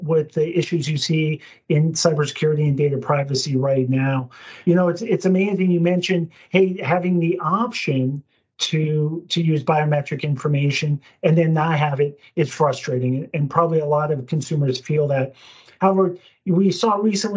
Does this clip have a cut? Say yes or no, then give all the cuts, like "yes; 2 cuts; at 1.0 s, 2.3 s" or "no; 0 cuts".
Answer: no; 0 cuts